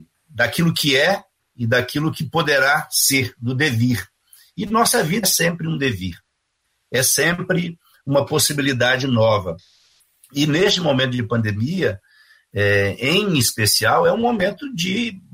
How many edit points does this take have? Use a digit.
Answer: 1